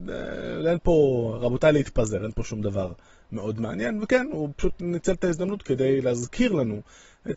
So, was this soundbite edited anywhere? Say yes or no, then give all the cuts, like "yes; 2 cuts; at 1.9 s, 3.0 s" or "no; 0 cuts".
no; 0 cuts